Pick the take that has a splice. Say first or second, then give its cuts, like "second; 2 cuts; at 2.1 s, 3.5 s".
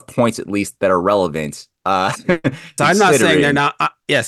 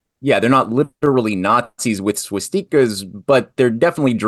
first; 1 cut; at 2.8 s